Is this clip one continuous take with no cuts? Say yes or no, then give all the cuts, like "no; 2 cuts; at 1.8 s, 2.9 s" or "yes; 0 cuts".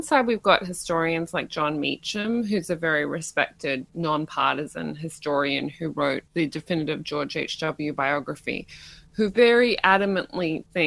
yes; 0 cuts